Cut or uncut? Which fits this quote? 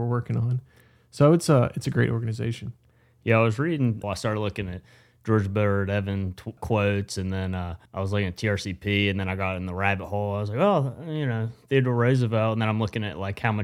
cut